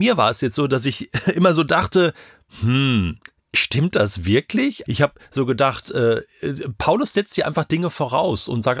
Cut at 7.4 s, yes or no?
no